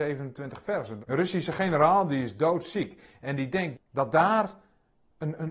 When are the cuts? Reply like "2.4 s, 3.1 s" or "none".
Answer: 1.0 s, 3.7 s